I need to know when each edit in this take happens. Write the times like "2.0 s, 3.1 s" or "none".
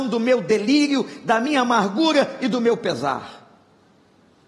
none